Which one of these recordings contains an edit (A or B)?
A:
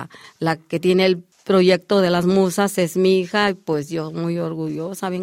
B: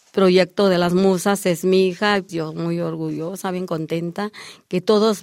B